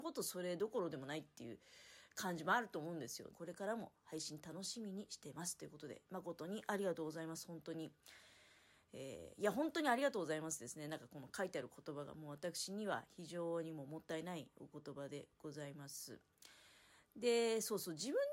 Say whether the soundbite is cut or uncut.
cut